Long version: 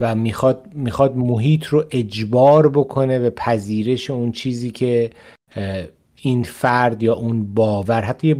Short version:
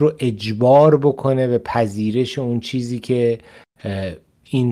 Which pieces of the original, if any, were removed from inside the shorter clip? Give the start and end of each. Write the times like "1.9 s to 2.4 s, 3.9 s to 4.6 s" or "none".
none